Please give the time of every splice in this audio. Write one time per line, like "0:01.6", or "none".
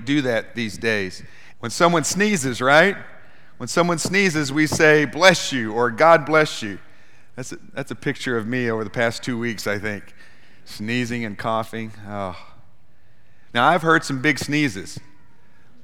0:01.5
0:13.5